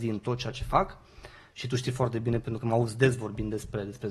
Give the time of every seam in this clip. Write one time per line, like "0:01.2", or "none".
none